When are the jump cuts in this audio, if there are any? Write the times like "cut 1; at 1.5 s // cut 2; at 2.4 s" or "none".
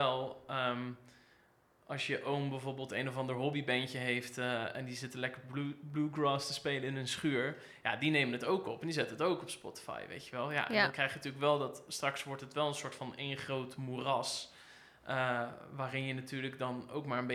none